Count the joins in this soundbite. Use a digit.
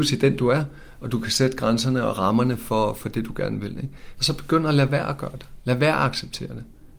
1